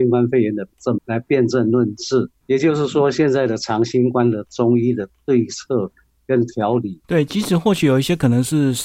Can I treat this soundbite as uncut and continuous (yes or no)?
no